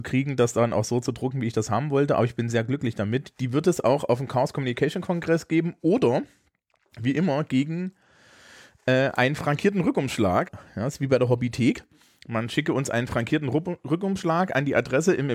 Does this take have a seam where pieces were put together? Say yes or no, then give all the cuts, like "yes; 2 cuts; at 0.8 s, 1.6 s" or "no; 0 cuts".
yes; 1 cut; at 10.5 s